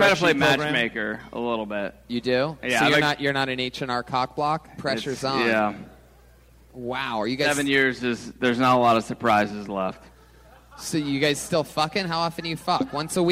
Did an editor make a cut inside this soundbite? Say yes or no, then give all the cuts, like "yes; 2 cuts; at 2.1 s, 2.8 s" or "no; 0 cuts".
yes; 1 cut; at 4.7 s